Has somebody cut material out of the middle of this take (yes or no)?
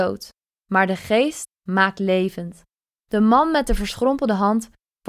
yes